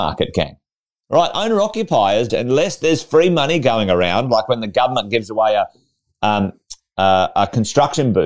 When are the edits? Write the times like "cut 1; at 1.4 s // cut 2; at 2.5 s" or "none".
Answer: cut 1; at 2.3 s